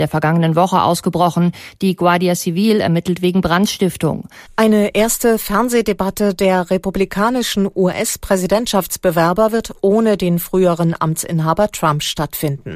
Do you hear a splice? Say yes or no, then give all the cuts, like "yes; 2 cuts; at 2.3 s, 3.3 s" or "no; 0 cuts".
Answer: yes; 1 cut; at 4.5 s